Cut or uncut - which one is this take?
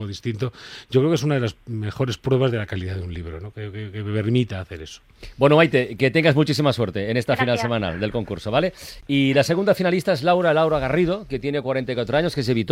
uncut